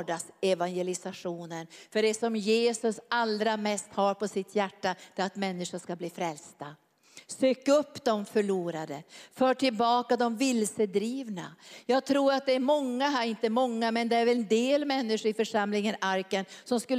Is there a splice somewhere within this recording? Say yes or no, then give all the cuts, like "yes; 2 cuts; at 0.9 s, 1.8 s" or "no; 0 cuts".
no; 0 cuts